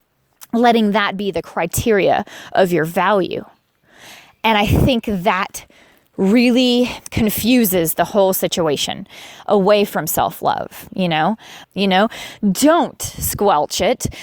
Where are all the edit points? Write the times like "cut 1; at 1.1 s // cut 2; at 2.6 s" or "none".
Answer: cut 1; at 7.1 s // cut 2; at 11.6 s